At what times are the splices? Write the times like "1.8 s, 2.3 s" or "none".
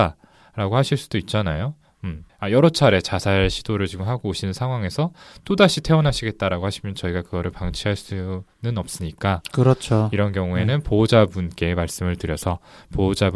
none